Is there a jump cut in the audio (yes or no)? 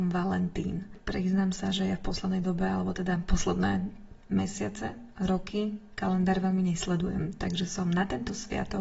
no